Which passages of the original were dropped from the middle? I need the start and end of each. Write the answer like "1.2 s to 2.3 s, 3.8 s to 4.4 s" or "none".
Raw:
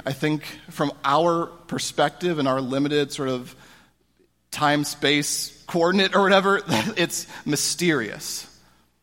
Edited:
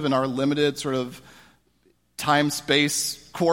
none